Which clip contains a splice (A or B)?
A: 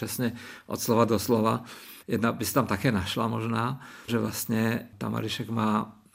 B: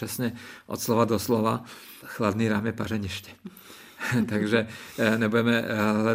A